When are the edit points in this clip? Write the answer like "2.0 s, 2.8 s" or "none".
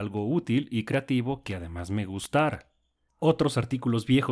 3.1 s